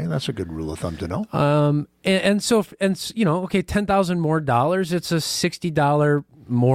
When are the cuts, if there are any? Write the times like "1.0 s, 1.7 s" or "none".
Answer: none